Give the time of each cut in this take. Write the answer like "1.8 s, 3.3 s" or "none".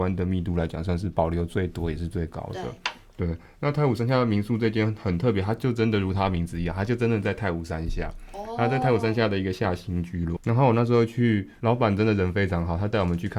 10.4 s, 11.6 s